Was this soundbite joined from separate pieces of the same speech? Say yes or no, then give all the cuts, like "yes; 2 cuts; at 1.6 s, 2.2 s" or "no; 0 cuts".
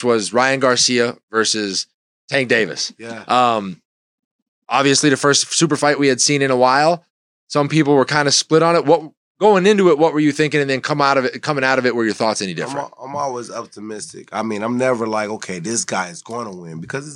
no; 0 cuts